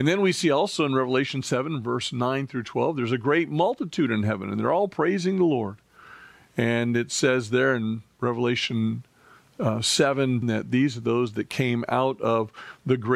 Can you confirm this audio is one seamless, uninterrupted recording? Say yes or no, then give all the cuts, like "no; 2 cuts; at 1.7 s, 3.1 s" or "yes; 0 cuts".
no; 1 cut; at 10.4 s